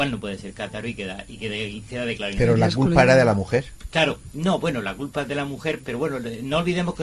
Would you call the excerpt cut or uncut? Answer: uncut